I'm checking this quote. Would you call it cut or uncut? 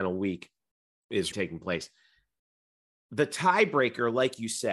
cut